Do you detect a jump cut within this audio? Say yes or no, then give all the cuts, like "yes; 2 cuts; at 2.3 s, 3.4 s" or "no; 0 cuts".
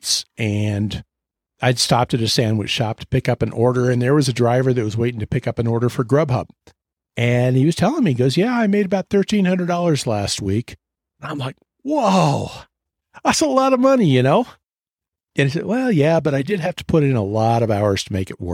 no; 0 cuts